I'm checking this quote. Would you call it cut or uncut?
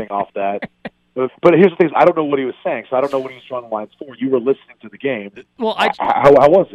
cut